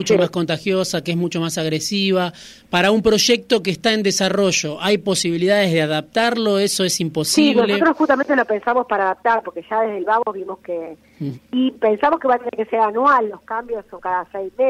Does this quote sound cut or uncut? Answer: cut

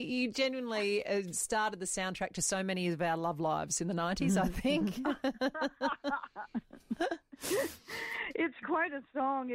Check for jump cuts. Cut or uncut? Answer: uncut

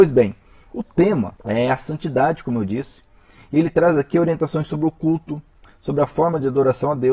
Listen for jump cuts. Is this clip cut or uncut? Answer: uncut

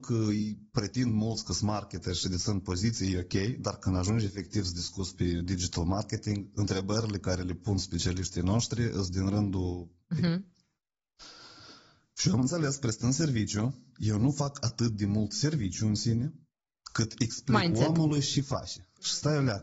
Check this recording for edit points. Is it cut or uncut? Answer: cut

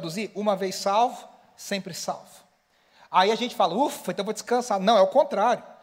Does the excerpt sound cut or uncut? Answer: uncut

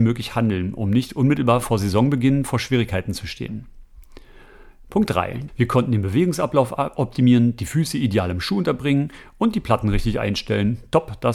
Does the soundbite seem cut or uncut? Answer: cut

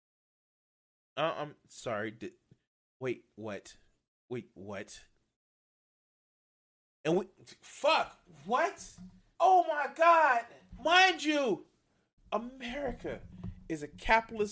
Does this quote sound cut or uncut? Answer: cut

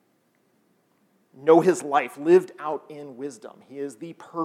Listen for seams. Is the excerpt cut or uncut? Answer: uncut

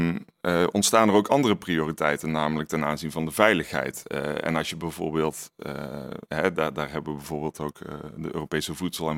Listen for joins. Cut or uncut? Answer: uncut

